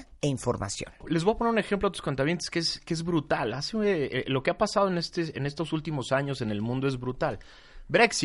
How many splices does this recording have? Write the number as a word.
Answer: one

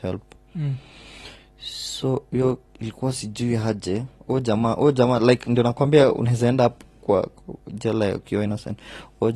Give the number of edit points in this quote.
one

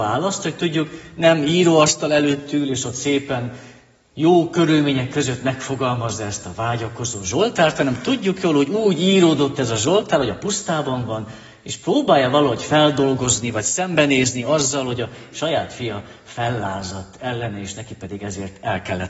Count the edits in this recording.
zero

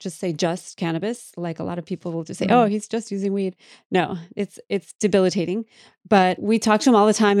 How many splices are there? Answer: zero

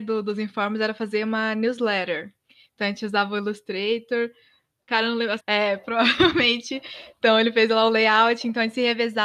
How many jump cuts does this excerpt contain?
one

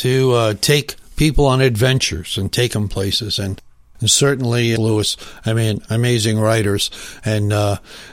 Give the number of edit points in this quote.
two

